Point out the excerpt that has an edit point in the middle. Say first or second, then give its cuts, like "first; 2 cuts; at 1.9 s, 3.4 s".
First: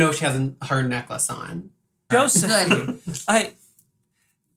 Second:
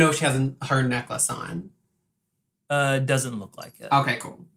first; 1 cut; at 2.1 s